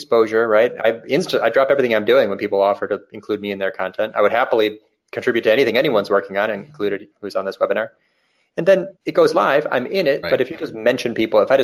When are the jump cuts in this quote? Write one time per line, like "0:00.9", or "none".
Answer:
0:07.1
0:09.0
0:10.2